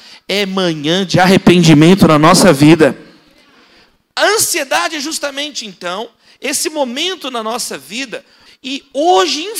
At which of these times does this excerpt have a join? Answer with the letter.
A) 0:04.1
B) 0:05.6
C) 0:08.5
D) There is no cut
C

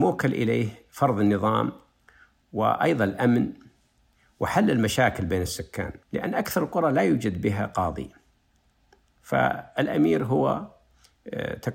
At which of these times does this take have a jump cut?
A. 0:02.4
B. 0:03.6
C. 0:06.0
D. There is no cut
C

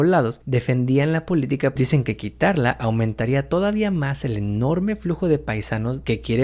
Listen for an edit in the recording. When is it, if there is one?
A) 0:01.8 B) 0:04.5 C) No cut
A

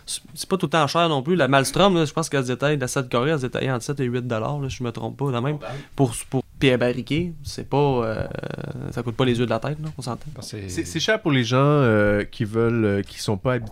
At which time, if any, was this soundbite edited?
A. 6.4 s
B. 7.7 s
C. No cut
A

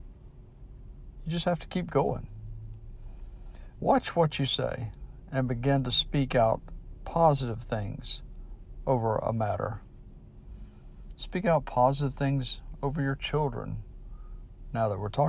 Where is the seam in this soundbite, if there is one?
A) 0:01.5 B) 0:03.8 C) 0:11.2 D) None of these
B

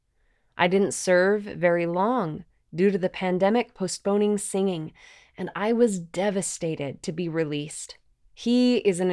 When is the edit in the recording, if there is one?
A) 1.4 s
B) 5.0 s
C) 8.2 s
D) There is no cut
C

